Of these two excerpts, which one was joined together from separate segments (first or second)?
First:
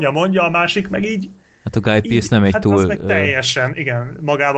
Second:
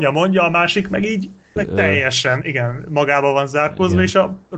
second